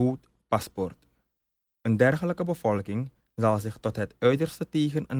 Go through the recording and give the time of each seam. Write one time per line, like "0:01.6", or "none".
0:01.7